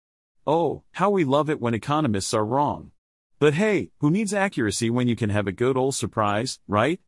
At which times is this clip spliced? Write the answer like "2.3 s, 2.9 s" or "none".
3.3 s